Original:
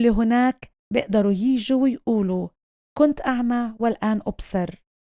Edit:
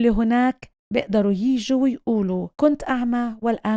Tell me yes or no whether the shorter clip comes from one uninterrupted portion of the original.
no